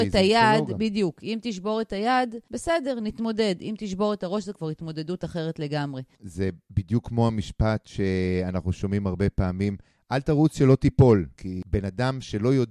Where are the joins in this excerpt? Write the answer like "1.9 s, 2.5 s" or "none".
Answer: 11.4 s